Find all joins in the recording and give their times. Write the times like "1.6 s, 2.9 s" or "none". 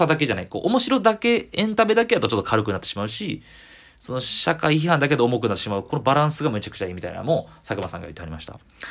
none